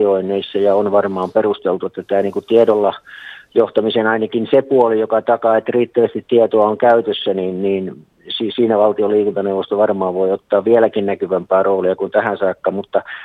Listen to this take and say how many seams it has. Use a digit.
0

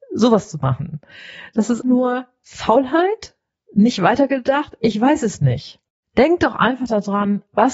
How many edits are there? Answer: 1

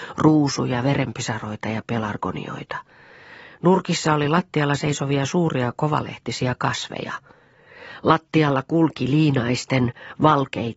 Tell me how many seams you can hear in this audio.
0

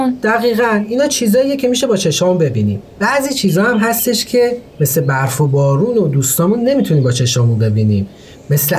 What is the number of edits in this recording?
1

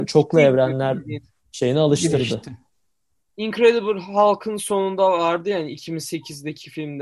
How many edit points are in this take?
0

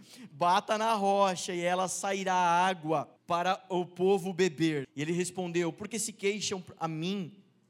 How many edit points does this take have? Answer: 2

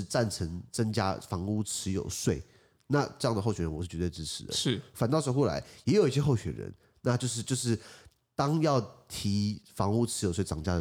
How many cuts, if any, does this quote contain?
0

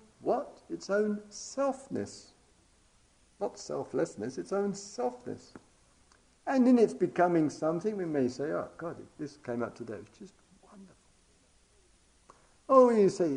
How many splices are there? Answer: 1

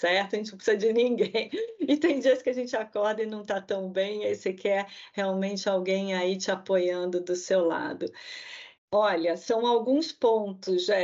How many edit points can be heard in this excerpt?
1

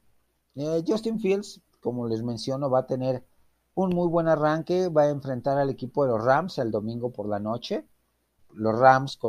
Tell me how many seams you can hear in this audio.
1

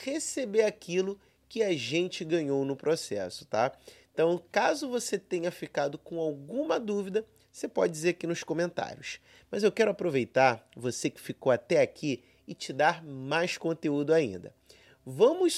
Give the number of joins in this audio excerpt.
0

